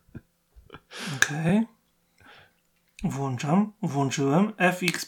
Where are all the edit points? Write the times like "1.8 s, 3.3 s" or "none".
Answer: none